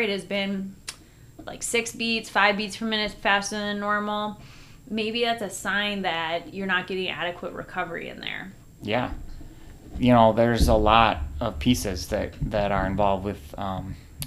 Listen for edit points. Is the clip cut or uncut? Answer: uncut